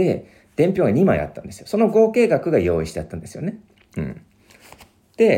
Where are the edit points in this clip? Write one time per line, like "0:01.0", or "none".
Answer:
none

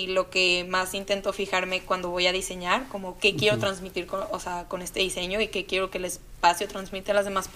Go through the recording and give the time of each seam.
none

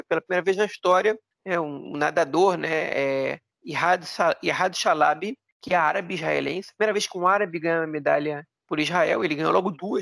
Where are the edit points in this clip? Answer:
none

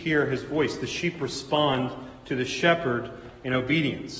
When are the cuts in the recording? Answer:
none

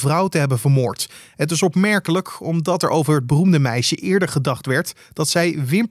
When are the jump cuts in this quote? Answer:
0:01.3

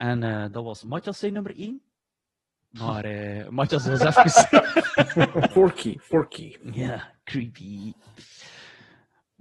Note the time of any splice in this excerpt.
0:05.5

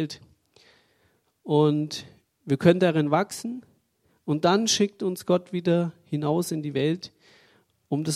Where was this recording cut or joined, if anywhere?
none

